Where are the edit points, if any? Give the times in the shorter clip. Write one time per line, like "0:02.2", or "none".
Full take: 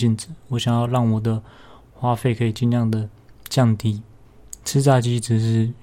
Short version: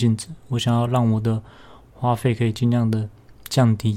none